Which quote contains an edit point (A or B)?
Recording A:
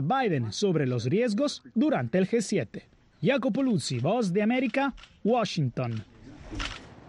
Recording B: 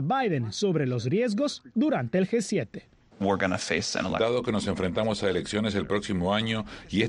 B